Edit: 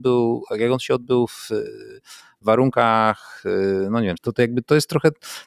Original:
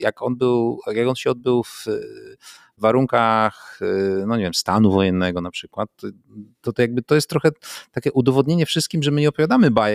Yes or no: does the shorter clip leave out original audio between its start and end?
yes